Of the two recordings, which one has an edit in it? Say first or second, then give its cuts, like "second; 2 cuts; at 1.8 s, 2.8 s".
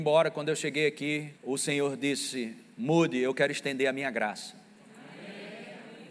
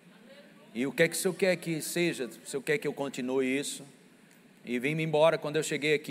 first; 1 cut; at 1.4 s